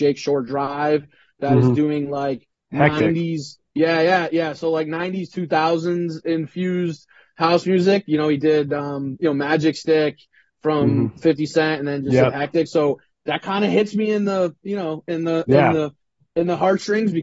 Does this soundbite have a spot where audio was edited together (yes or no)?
no